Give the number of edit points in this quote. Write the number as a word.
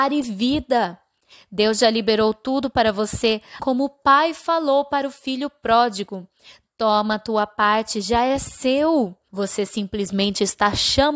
two